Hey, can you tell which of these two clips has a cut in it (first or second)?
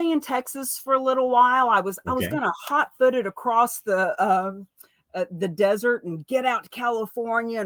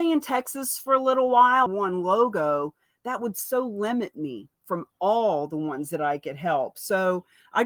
second